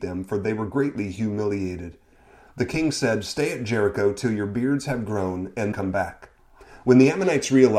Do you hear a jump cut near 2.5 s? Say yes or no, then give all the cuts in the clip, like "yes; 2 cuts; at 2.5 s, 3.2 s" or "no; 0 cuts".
no; 1 cut; at 5.7 s